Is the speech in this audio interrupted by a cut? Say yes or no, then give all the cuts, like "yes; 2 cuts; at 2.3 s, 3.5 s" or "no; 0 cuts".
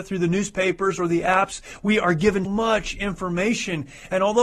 yes; 1 cut; at 2.4 s